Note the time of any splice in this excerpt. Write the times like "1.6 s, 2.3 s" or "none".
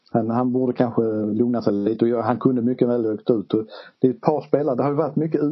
none